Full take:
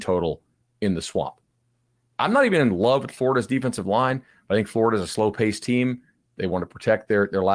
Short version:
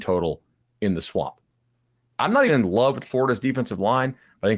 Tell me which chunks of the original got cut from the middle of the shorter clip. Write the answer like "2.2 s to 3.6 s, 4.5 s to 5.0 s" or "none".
2.5 s to 2.5 s